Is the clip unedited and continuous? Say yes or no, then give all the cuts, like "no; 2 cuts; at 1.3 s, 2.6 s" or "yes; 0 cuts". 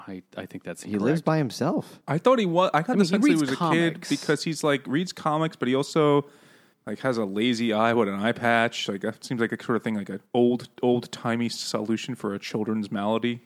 yes; 0 cuts